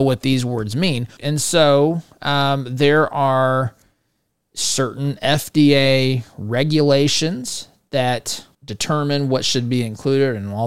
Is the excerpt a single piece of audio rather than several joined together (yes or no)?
no